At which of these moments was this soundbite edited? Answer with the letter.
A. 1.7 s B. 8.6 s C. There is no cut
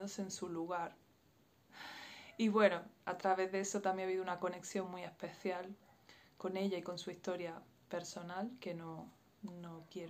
A